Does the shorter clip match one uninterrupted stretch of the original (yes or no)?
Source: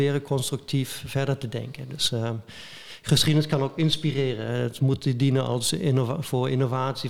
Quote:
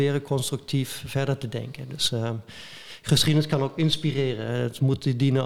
yes